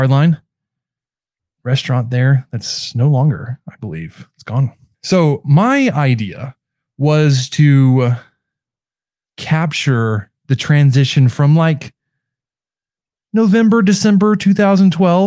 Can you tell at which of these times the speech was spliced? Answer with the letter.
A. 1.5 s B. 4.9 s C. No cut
B